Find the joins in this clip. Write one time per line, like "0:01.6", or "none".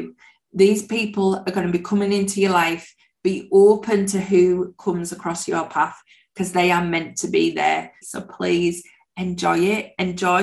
0:08.0